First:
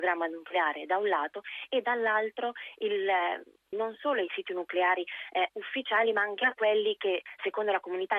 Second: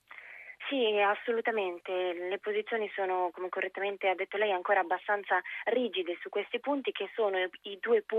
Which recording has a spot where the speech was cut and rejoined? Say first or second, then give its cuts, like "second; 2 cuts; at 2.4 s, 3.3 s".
first; 1 cut; at 3.7 s